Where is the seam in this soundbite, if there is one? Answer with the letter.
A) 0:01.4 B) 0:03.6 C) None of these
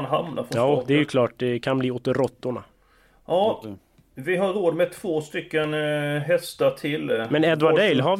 B